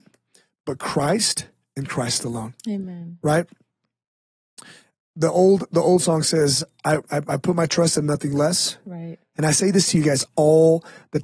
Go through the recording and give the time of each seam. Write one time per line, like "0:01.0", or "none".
0:09.3